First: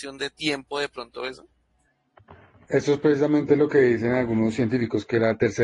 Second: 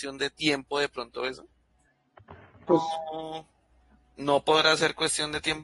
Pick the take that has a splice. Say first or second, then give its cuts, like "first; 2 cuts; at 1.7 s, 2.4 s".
second; 1 cut; at 2.7 s